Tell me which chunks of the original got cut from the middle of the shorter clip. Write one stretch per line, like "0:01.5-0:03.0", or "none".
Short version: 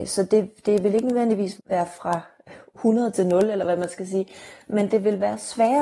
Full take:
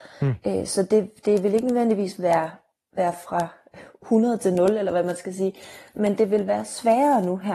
0:02.2-0:02.8